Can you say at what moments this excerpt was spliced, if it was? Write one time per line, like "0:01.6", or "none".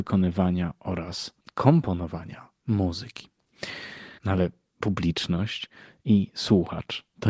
0:04.2